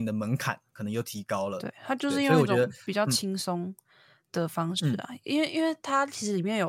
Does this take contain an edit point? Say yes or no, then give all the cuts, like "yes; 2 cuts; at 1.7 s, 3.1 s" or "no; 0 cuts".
no; 0 cuts